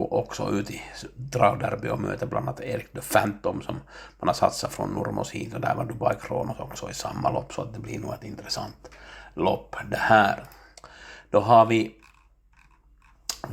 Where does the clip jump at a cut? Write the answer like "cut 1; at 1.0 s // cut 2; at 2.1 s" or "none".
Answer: none